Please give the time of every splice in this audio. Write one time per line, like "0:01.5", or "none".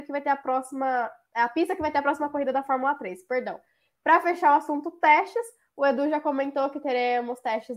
none